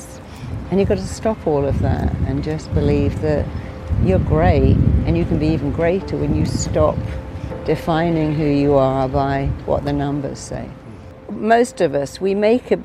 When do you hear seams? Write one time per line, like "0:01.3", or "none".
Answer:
none